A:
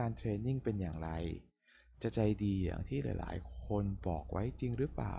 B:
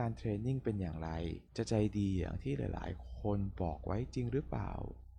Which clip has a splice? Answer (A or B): B